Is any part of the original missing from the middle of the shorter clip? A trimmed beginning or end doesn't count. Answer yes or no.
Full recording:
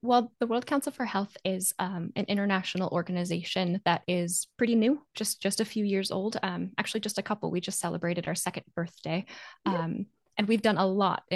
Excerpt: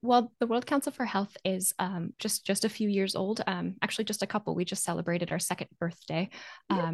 yes